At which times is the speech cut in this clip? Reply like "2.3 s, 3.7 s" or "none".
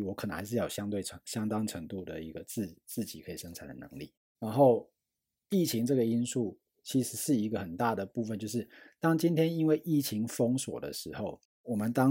4.3 s